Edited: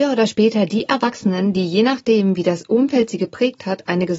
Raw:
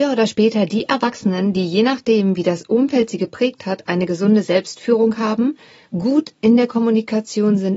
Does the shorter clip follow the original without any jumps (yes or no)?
yes